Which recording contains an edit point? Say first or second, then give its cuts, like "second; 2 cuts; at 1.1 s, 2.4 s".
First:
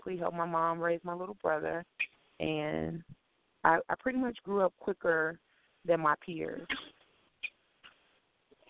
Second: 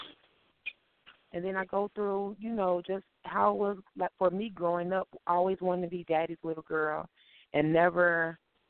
second; 1 cut; at 1.2 s